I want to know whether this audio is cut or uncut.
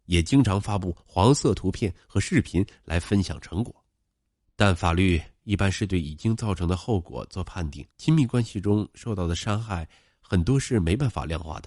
cut